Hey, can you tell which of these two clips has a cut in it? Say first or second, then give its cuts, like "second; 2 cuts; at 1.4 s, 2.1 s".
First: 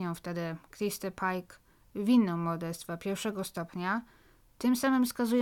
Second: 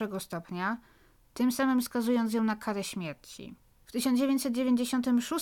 second; 1 cut; at 3.8 s